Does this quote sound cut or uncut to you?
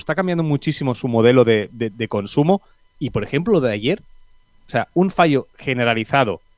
uncut